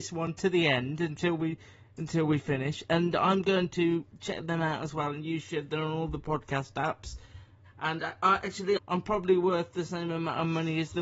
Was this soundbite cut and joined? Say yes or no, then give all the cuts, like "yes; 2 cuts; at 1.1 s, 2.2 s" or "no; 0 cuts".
yes; 2 cuts; at 7.7 s, 8.8 s